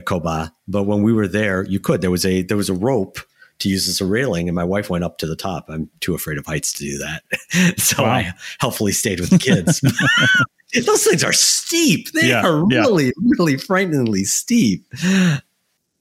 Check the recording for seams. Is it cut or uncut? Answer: uncut